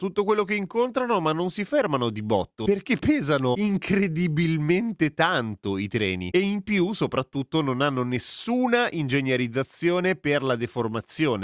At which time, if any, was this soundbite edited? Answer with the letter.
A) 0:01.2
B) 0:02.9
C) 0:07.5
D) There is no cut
D